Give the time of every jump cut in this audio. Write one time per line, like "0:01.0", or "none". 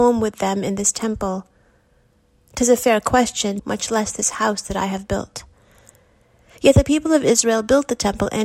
0:03.6